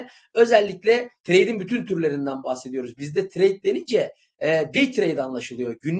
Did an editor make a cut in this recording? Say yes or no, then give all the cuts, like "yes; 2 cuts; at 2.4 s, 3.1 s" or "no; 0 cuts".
no; 0 cuts